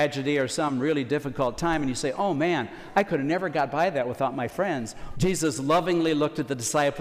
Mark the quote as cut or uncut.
cut